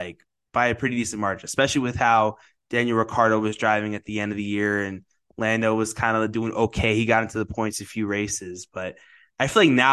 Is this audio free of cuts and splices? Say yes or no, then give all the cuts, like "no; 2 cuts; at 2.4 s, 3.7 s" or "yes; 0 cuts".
yes; 0 cuts